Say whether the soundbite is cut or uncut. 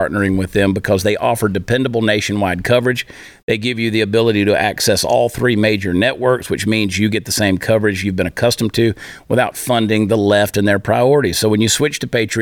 uncut